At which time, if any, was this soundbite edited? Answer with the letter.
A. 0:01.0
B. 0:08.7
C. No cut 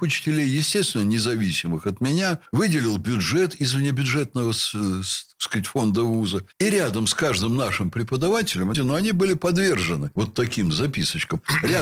B